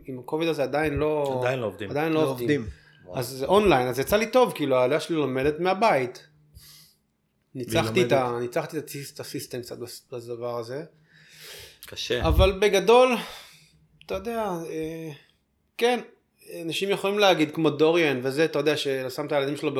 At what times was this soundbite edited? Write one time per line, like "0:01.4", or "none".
none